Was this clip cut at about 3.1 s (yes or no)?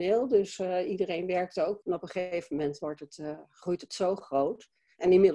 no